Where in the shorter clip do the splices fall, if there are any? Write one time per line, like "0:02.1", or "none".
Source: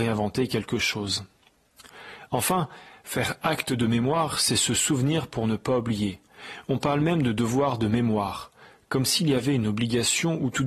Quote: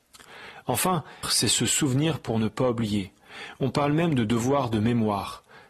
0:01.2